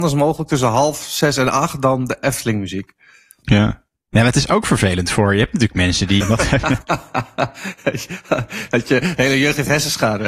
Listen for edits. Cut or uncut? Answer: cut